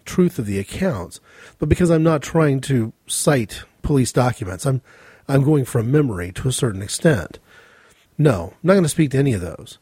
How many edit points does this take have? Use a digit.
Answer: 1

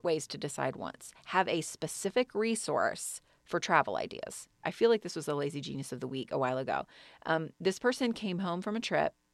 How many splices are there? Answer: 1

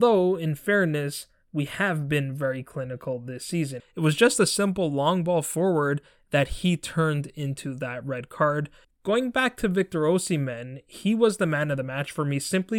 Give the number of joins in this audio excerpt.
2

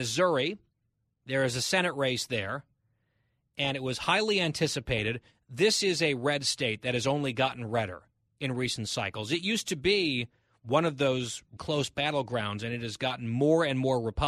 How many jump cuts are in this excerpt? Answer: 1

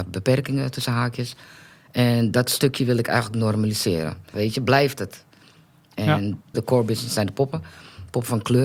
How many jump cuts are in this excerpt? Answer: 2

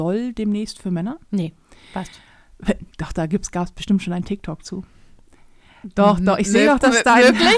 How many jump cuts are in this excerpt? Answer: 1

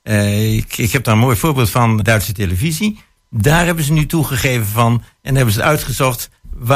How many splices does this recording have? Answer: 2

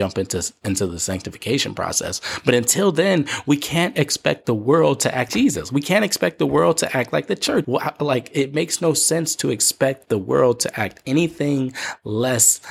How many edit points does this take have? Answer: 2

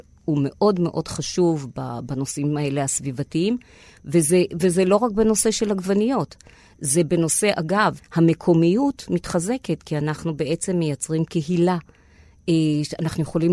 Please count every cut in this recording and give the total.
1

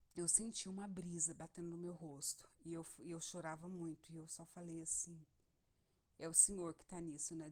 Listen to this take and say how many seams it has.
0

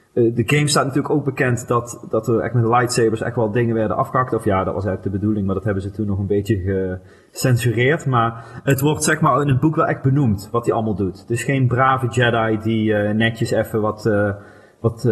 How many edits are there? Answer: 0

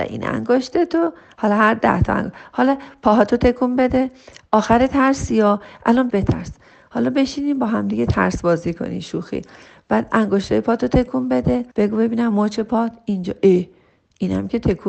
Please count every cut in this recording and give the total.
2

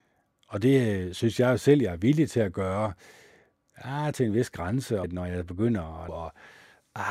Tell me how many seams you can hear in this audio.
2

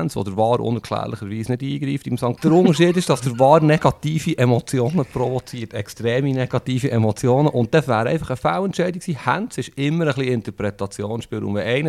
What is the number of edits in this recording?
1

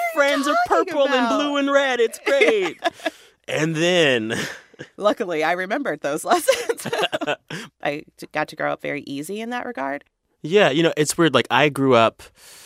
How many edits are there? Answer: 1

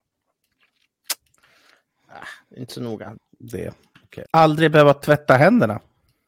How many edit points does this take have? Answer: 2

